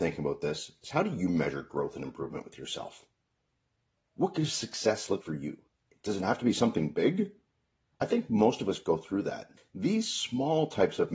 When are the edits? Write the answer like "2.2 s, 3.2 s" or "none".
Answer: 5.2 s, 7.9 s, 9.6 s